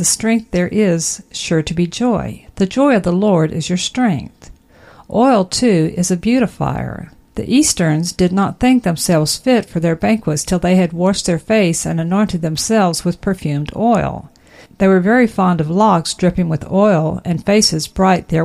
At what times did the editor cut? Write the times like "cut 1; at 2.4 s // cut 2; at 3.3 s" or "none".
none